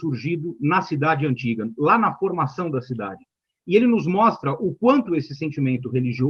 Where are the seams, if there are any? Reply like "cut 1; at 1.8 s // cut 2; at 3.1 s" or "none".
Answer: none